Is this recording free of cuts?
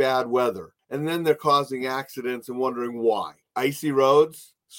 no; 1 cut; at 3.5 s

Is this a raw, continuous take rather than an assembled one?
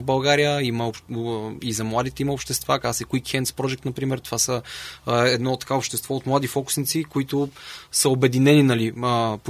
yes; 0 cuts

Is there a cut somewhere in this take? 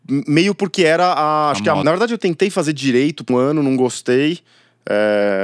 yes; 2 cuts; at 1.8 s, 3.3 s

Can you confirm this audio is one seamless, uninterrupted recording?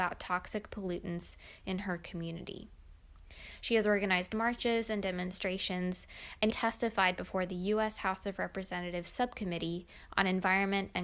no; 1 cut; at 6.5 s

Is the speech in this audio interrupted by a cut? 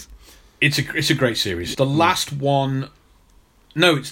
yes; 1 cut; at 1.7 s

